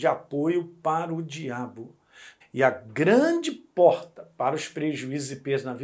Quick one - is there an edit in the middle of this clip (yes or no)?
yes